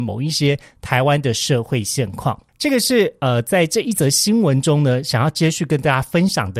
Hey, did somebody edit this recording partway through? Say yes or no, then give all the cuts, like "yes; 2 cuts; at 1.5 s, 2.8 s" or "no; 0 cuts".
no; 0 cuts